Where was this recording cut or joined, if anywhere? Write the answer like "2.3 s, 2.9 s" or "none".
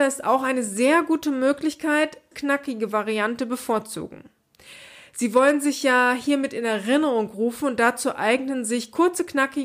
2.3 s